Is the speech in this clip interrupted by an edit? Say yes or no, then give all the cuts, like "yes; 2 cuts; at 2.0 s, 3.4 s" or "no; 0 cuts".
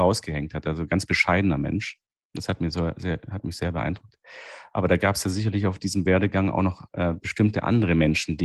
no; 0 cuts